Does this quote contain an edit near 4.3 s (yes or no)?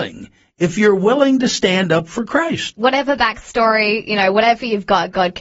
no